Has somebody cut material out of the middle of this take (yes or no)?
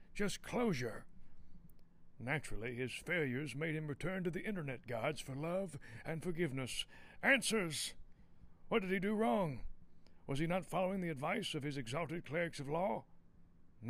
yes